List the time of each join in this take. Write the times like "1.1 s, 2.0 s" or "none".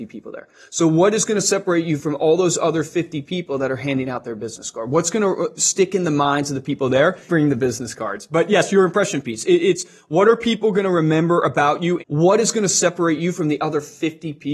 7.3 s, 12.0 s